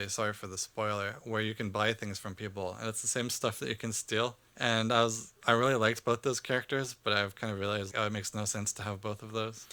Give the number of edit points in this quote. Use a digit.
2